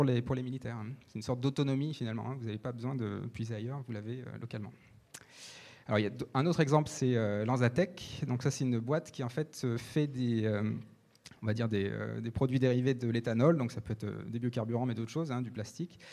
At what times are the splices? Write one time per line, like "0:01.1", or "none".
none